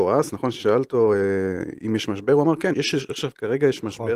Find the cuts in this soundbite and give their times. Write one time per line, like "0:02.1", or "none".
0:02.7